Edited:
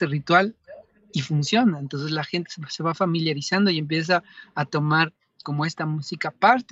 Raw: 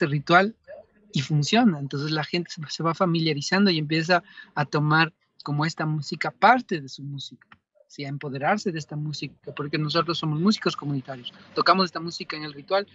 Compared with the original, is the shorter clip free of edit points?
yes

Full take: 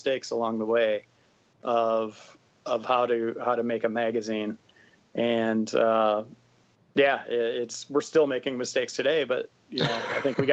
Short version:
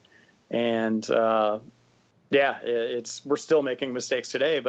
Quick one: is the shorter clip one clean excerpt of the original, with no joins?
yes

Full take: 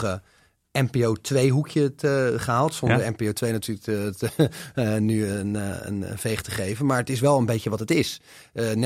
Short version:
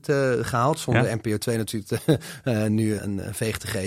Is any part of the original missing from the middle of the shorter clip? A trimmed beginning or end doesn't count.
yes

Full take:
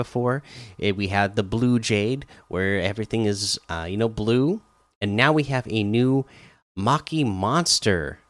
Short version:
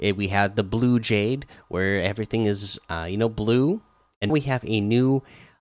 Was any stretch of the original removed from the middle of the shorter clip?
yes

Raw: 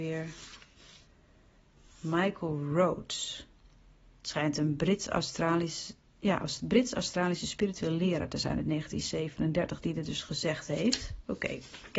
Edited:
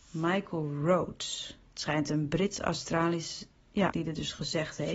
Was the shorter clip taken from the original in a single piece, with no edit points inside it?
no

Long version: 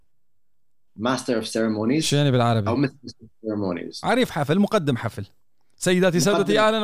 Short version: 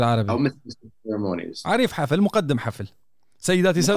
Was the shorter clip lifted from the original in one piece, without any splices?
yes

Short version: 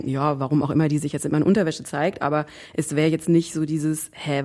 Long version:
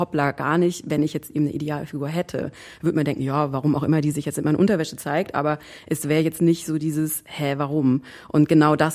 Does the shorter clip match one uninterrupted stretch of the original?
yes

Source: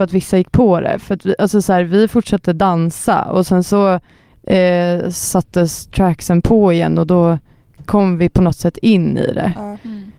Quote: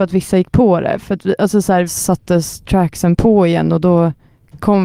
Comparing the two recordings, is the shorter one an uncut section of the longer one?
no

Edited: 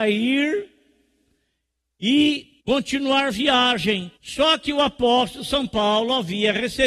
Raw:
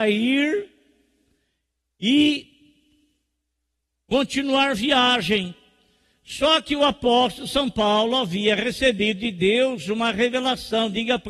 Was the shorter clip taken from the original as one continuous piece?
no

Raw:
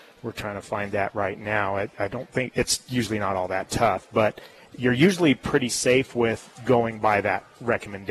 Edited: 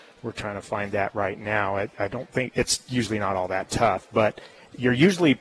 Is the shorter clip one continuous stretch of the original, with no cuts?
yes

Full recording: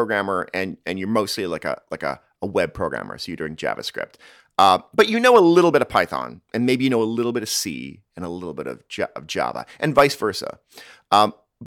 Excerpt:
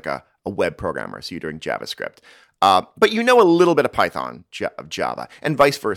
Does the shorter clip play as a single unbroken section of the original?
no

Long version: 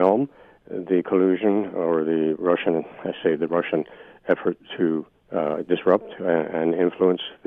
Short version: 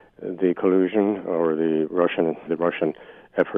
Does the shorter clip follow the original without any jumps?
no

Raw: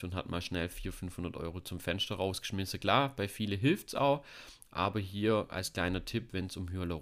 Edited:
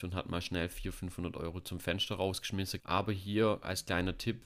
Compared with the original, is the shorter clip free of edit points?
no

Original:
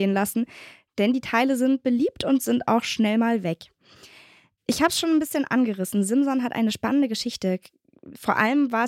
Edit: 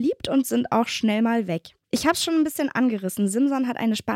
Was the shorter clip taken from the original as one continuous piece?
no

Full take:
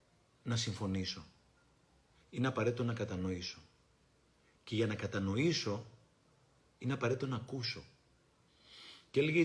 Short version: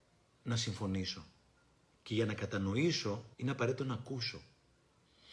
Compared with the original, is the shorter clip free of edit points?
no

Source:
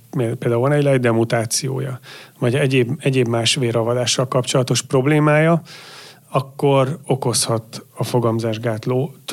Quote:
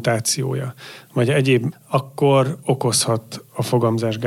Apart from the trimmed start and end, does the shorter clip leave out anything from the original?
yes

